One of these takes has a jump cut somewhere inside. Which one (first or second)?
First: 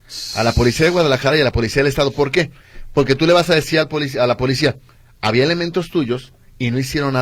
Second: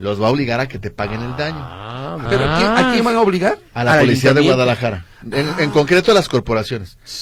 second